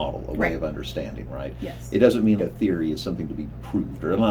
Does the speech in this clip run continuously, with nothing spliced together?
no; 1 cut; at 2.4 s

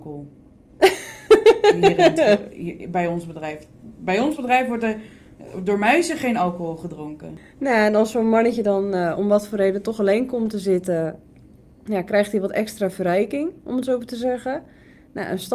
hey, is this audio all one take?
yes; 0 cuts

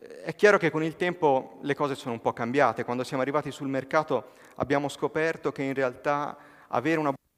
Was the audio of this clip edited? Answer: no; 0 cuts

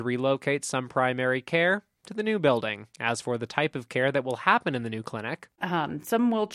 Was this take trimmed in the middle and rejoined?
yes; 2 cuts; at 2.9 s, 5.6 s

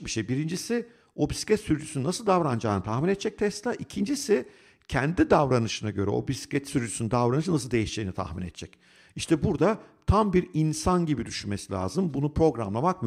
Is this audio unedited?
yes; 0 cuts

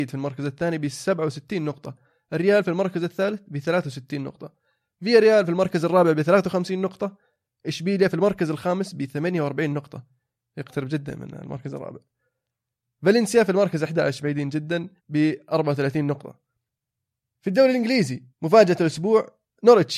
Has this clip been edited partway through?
yes; 2 cuts; at 15.0 s, 18.3 s

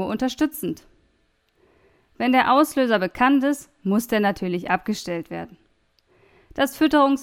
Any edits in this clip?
no; 0 cuts

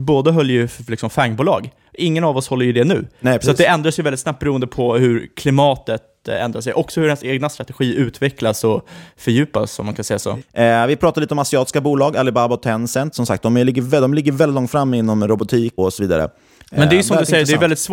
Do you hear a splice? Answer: yes; 3 cuts; at 10.4 s, 13.1 s, 15.8 s

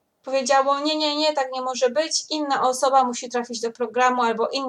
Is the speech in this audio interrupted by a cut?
no; 0 cuts

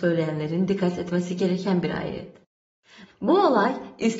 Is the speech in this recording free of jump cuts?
no; 1 cut; at 3.1 s

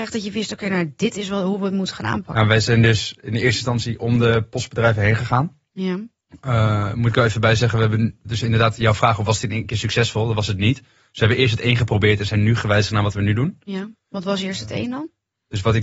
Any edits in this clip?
yes; 1 cut; at 8.2 s

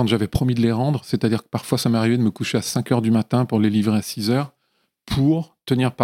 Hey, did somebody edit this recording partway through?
no; 0 cuts

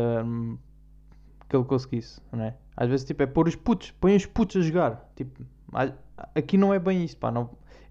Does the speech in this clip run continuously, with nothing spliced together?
yes; 0 cuts

